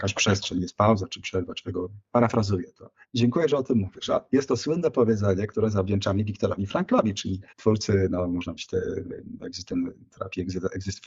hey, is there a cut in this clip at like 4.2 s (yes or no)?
no